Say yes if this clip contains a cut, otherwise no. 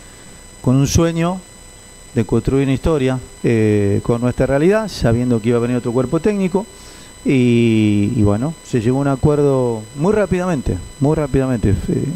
yes